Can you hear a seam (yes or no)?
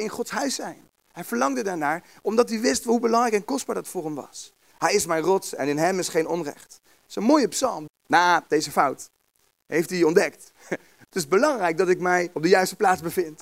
yes